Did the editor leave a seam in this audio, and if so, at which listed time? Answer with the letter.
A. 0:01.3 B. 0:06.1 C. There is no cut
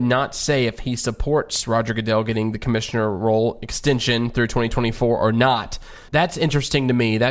B